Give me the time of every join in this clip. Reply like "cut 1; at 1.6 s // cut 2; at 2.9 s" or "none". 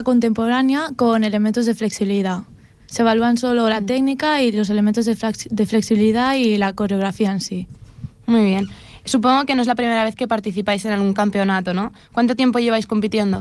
none